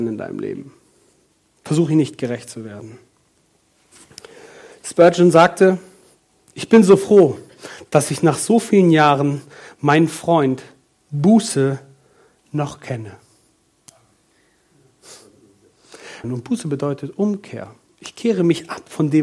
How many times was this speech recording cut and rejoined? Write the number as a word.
one